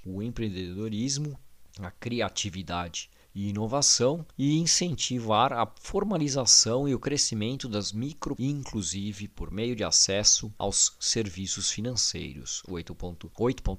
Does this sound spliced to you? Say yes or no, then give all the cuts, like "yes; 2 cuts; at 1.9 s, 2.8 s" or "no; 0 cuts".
yes; 1 cut; at 8.4 s